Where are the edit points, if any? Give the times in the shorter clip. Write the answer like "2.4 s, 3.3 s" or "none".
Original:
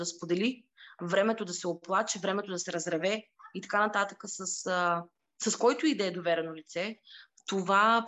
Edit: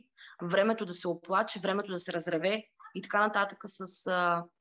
none